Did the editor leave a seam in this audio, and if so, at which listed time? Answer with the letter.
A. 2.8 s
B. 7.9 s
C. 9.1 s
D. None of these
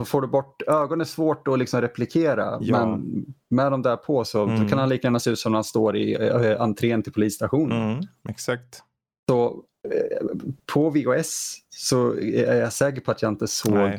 C